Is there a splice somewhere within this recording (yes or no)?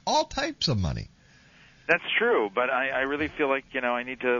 no